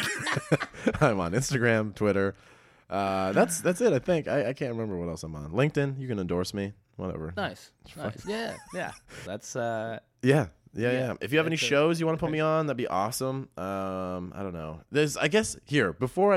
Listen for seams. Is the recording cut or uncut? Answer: cut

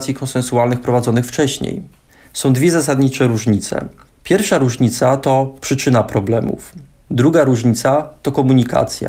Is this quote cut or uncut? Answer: uncut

